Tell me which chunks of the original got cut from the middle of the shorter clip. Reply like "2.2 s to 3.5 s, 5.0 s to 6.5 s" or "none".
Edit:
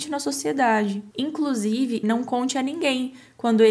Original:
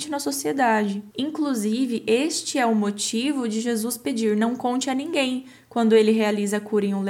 2.0 s to 4.4 s